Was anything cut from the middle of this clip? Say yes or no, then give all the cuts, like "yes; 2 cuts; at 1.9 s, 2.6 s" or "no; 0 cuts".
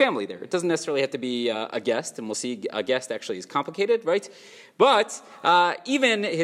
no; 0 cuts